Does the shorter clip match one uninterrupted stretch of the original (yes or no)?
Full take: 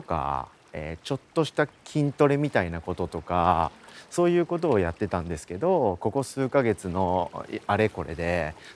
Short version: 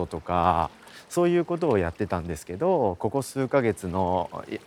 yes